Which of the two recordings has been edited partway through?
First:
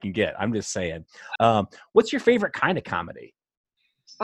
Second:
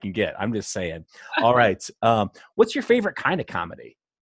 first; 1 cut; at 1.4 s

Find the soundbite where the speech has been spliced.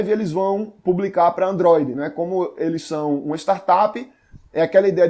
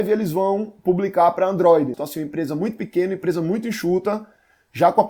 second; 1 cut; at 1.9 s

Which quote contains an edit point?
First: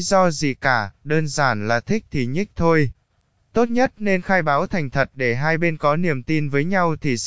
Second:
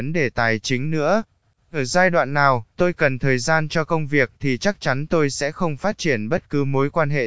first; 1 cut; at 3.4 s

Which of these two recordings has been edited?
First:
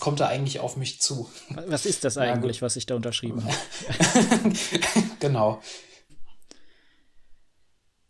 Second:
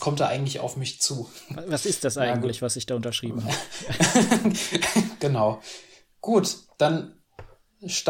first; 1 cut; at 6.1 s

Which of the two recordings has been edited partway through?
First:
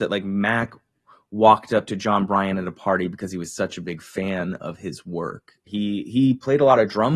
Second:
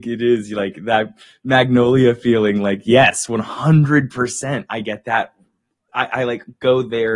first; 1 cut; at 5.7 s

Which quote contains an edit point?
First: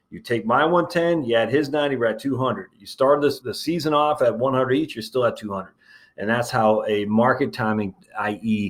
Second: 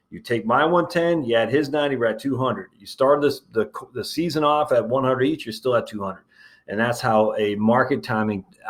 first; 1 cut; at 3.4 s

